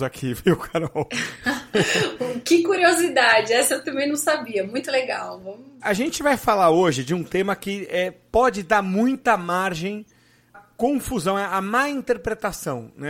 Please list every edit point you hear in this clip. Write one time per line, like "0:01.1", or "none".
0:05.8
0:10.5